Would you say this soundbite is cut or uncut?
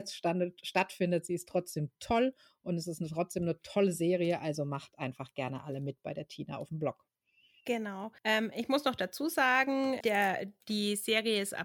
cut